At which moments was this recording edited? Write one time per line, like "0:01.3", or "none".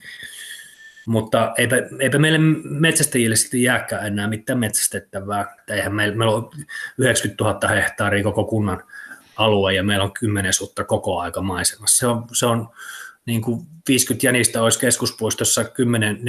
0:05.6
0:12.0